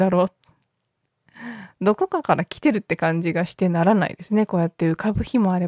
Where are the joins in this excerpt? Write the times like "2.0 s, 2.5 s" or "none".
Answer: none